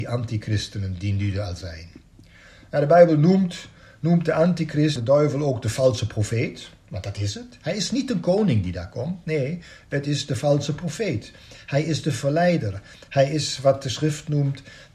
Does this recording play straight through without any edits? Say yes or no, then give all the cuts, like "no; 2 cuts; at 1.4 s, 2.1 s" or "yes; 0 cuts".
no; 1 cut; at 5.0 s